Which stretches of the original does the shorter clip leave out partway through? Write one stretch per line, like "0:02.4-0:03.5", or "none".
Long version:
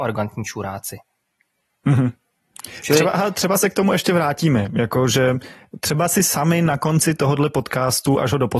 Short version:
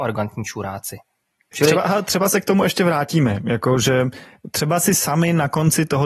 0:01.5-0:02.8